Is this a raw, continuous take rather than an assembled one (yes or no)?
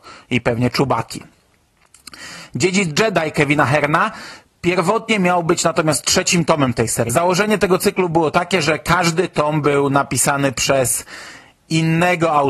no